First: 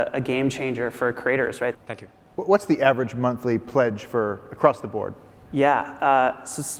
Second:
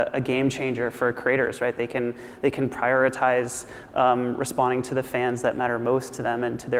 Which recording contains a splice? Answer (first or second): first